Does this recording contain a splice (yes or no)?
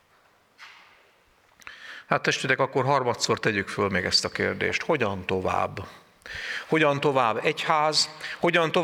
no